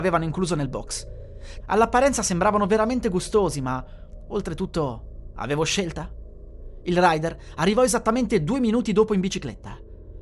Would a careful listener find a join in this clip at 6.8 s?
yes; 2 cuts; at 1.6 s, 6.8 s

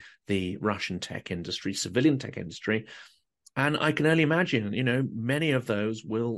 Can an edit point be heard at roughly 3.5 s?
no; 0 cuts

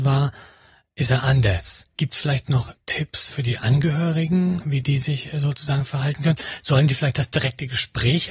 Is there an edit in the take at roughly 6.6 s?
no; 1 cut; at 3.3 s

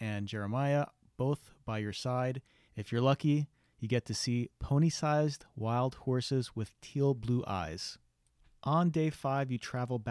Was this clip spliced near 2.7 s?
yes; 1 cut; at 2.7 s

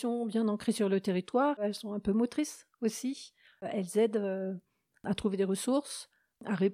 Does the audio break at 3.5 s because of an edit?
no; 0 cuts

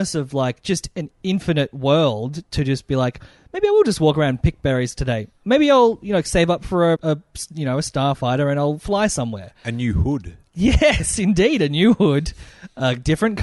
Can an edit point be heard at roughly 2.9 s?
no; 1 cut; at 7.0 s

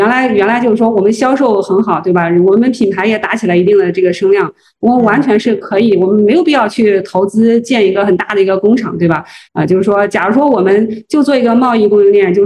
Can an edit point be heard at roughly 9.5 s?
yes; 1 cut; at 9.5 s

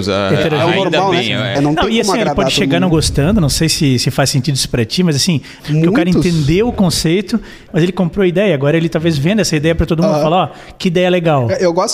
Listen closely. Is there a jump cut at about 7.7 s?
yes; 3 cuts; at 1.6 s, 5.6 s, 7.7 s

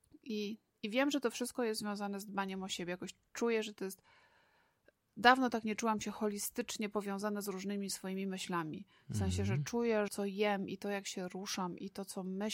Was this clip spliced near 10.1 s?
yes; 1 cut; at 10.1 s

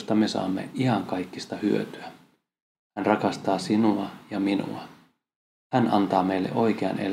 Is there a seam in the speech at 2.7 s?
yes; 1 cut; at 2.7 s

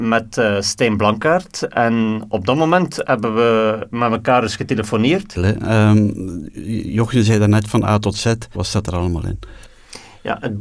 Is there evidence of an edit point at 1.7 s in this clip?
no; 2 cuts; at 5.3 s, 8.5 s

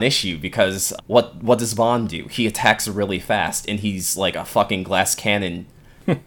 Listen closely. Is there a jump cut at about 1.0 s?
yes; 1 cut; at 1.0 s

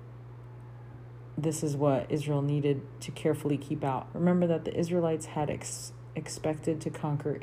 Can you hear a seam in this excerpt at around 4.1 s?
yes; 1 cut; at 4.1 s

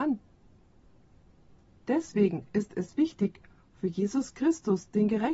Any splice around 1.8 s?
no; 0 cuts

